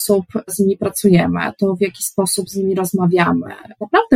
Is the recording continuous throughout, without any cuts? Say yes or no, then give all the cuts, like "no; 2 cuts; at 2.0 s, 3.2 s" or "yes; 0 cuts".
yes; 0 cuts